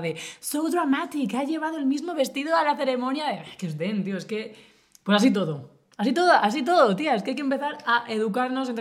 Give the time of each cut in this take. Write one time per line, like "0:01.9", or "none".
none

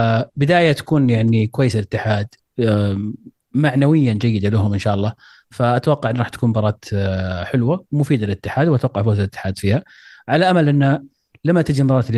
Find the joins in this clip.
none

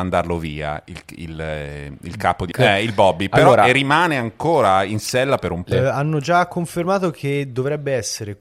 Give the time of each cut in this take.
0:02.5
0:05.7

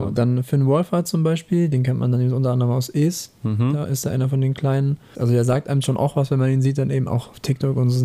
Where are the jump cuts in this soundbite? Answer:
0:05.1

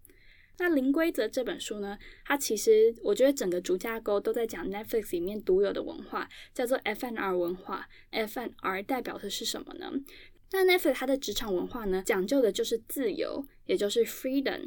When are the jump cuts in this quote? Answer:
none

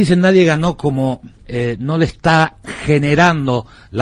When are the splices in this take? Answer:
0:01.4

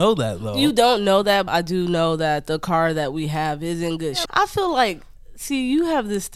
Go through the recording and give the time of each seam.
0:01.5
0:04.3

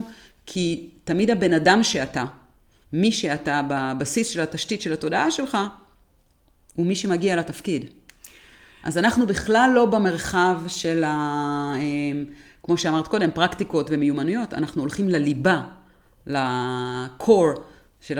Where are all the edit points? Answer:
none

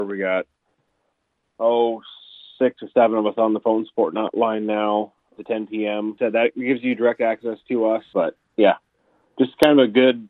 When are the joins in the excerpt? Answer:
0:05.4
0:08.1

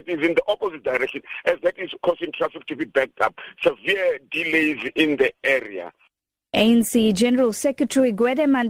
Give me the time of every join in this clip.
0:02.0

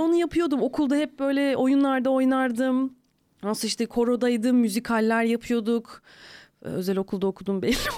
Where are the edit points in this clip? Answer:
none

